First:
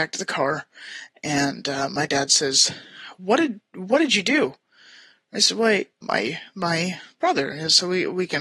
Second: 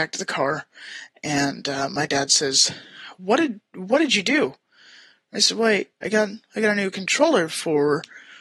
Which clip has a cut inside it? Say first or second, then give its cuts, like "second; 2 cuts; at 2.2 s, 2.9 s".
first; 1 cut; at 6.0 s